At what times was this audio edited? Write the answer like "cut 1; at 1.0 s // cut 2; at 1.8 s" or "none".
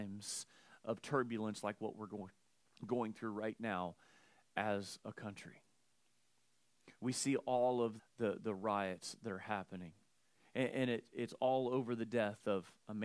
cut 1; at 8.0 s